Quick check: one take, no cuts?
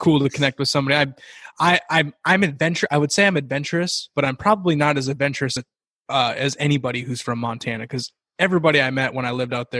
yes; 0 cuts

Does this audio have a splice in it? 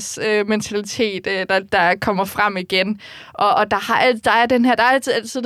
no; 0 cuts

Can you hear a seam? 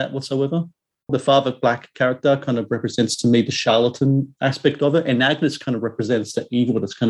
yes; 1 cut; at 1.1 s

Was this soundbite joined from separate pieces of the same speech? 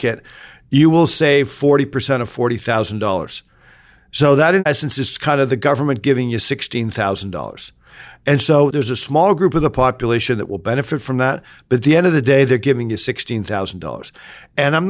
no; 0 cuts

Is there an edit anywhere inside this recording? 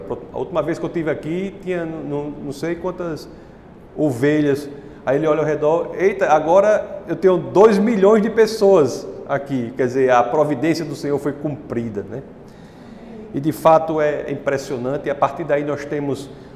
no; 0 cuts

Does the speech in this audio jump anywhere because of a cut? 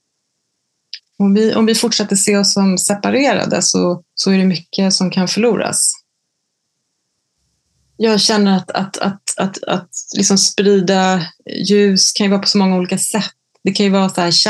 yes; 1 cut; at 4.1 s

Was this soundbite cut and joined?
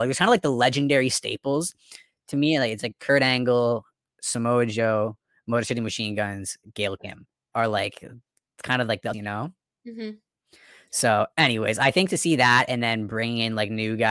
yes; 1 cut; at 9.1 s

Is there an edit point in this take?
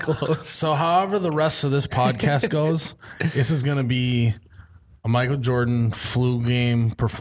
no; 0 cuts

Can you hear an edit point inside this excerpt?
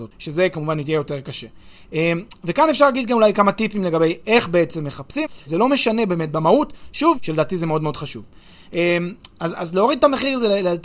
yes; 2 cuts; at 5.5 s, 7.1 s

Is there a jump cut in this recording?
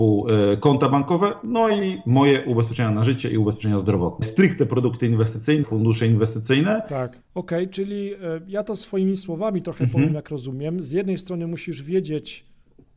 yes; 3 cuts; at 4.2 s, 5.6 s, 7.2 s

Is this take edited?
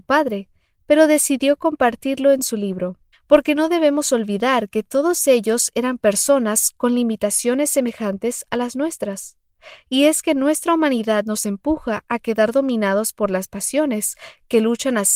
yes; 1 cut; at 3.1 s

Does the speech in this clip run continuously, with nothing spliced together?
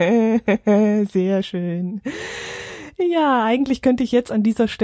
yes; 0 cuts

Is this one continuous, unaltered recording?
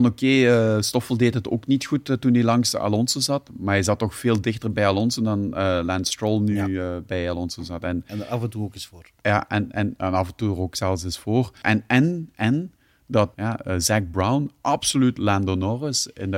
no; 2 cuts; at 11.6 s, 13.3 s

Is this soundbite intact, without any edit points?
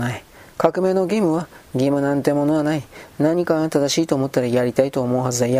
yes; 0 cuts

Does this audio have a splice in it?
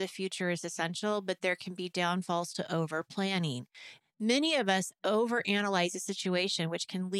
no; 0 cuts

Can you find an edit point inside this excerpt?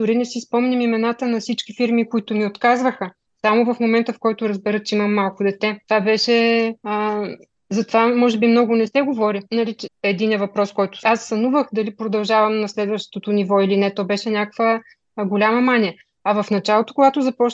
yes; 2 cuts; at 9.9 s, 11.0 s

